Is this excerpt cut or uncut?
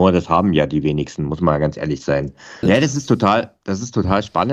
cut